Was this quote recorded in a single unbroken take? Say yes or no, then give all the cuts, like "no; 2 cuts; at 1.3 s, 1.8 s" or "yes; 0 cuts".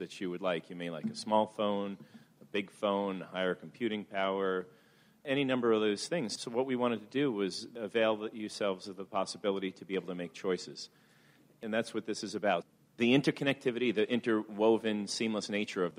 yes; 0 cuts